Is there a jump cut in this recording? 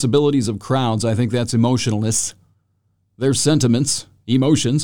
no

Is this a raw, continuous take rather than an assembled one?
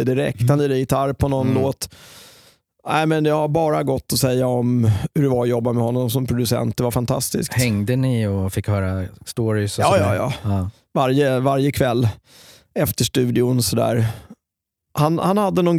yes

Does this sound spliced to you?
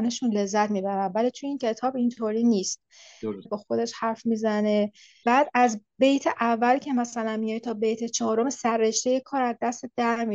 yes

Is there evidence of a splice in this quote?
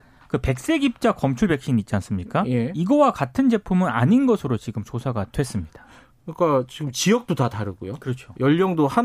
no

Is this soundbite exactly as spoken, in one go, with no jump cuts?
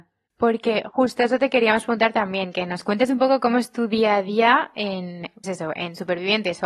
no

